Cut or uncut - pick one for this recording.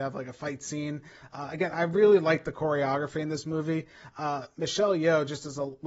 uncut